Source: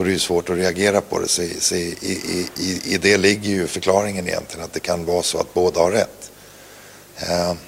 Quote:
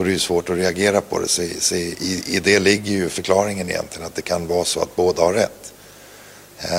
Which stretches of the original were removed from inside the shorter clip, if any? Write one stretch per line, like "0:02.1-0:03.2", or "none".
0:02.0-0:02.6